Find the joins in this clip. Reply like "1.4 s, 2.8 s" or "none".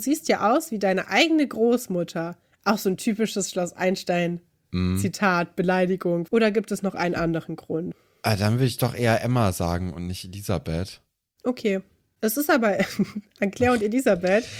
6.3 s